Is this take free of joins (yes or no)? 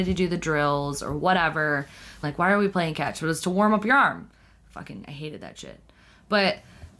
no